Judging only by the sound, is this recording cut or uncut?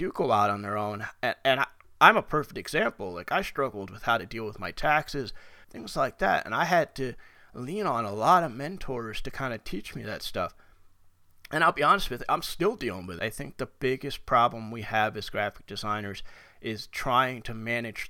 cut